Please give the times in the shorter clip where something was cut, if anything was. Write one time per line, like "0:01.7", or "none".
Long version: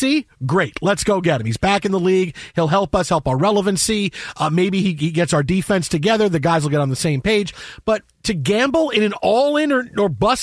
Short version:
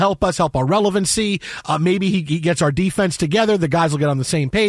none